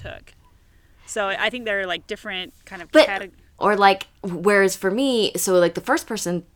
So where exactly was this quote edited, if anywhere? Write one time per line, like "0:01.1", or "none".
0:03.6